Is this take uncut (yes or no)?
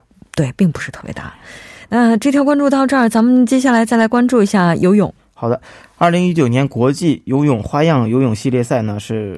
yes